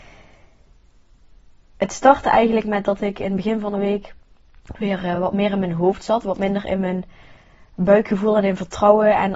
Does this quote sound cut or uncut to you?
uncut